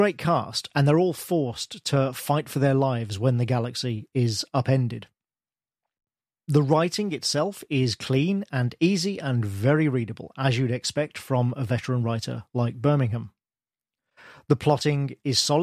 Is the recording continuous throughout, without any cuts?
yes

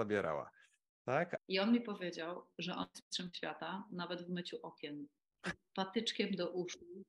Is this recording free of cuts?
no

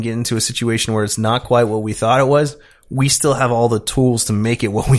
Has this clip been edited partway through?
no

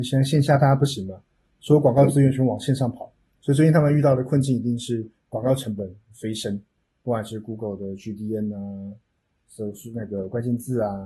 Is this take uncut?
yes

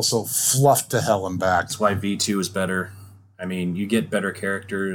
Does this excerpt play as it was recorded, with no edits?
yes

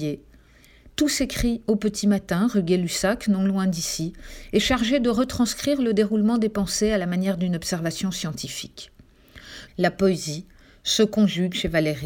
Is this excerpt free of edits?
no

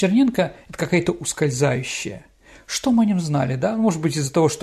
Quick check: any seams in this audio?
no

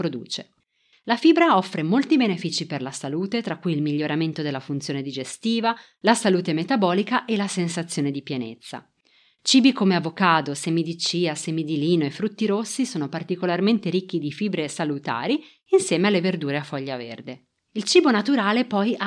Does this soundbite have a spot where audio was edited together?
yes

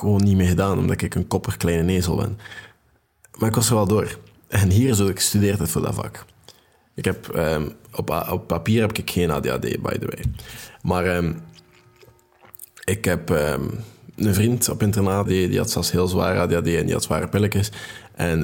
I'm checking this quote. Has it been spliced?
yes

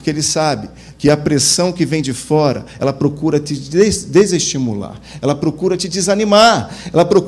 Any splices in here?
no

